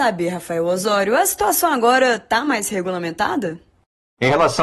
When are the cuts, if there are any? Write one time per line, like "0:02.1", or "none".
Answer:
none